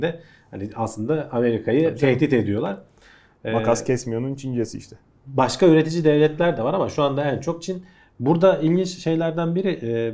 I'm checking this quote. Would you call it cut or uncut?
uncut